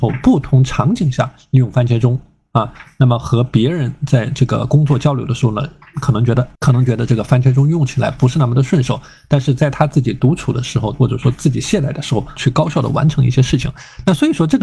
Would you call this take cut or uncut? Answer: cut